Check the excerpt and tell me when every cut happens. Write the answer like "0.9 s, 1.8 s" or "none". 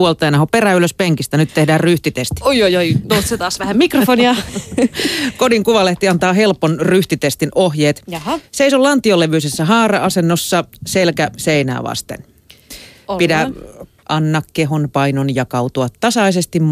14.0 s